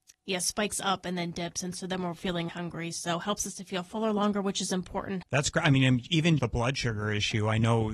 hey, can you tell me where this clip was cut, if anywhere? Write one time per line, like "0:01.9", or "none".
0:02.5
0:05.2
0:06.4